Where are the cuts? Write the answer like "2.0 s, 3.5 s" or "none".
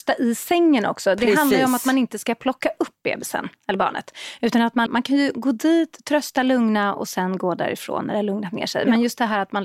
4.9 s